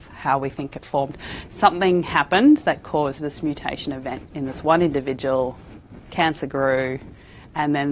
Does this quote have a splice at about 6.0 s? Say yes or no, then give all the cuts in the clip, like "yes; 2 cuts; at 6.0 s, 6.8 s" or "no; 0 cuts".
no; 1 cut; at 1.5 s